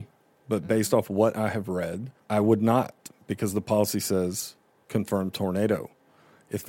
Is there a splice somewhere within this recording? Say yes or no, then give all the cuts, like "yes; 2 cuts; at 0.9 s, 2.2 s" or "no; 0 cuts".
yes; 1 cut; at 2.2 s